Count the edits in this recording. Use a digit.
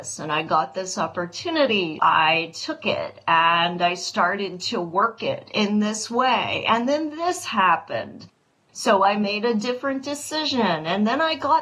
1